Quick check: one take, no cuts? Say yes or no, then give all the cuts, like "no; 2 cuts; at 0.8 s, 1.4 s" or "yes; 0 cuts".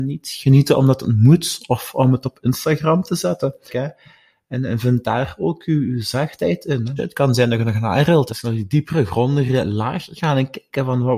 no; 3 cuts; at 3.7 s, 7.0 s, 8.3 s